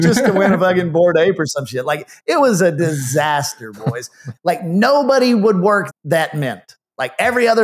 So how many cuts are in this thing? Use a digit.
2